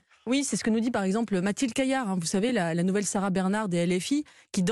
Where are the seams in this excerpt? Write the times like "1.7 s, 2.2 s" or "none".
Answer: none